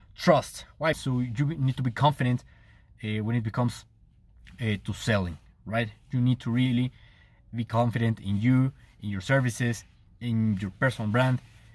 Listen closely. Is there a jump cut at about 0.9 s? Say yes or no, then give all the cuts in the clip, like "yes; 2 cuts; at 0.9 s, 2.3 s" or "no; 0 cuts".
yes; 1 cut; at 0.9 s